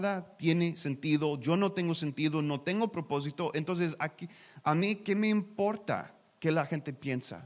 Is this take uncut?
yes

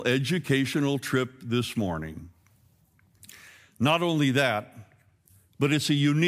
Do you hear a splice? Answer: no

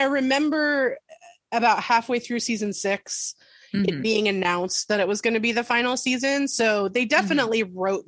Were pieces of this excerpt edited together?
no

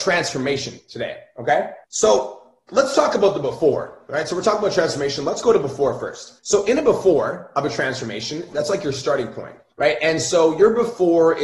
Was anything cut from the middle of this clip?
yes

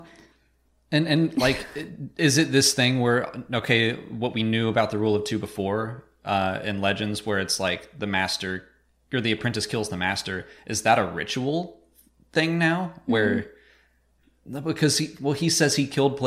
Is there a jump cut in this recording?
no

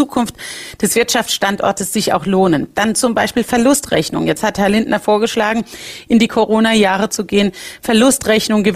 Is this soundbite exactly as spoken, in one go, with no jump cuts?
yes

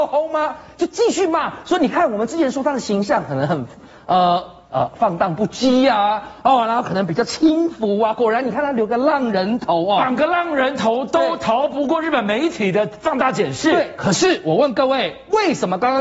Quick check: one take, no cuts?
yes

